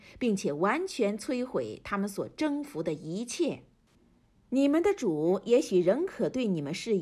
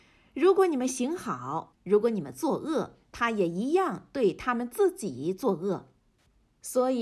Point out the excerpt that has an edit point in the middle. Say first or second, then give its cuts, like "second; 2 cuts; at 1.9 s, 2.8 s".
second; 1 cut; at 1.7 s